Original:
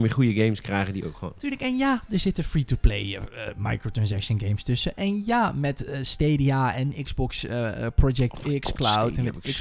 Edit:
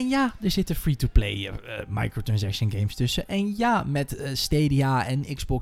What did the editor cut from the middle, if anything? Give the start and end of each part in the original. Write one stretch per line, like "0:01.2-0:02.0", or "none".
none